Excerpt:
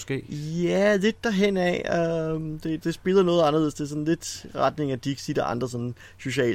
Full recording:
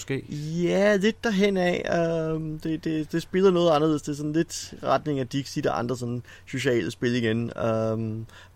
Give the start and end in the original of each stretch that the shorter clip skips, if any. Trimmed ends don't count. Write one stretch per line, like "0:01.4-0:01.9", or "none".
0:02.8-0:03.1